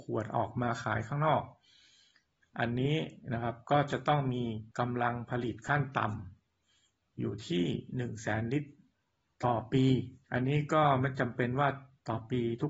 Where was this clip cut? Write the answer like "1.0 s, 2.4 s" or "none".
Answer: 4.7 s, 10.2 s